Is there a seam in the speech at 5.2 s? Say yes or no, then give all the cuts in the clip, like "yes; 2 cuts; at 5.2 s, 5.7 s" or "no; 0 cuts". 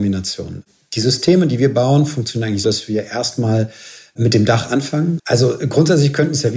yes; 2 cuts; at 2.6 s, 5.2 s